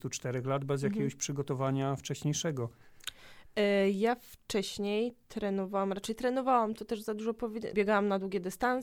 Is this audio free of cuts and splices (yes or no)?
no